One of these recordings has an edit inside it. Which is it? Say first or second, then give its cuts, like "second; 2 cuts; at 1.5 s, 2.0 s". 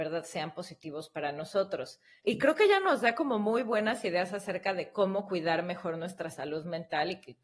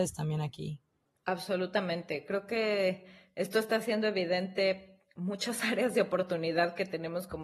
first; 1 cut; at 2.2 s